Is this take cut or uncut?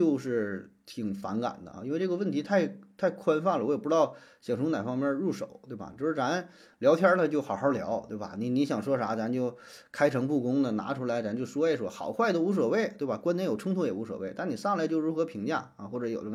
uncut